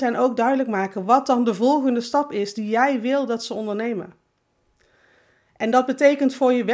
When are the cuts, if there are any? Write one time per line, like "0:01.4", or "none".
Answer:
none